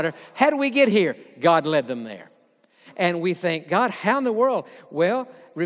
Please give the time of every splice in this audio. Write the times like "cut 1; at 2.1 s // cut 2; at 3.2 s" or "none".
cut 1; at 2.9 s